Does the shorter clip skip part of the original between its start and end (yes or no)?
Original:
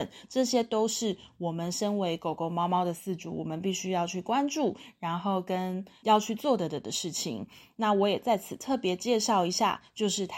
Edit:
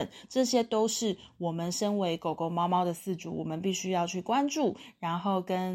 no